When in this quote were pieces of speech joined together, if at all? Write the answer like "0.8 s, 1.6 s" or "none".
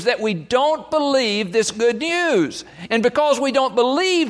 2.9 s